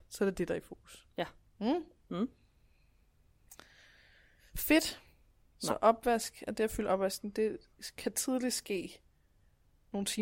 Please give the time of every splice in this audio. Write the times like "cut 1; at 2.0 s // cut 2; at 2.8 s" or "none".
cut 1; at 5.5 s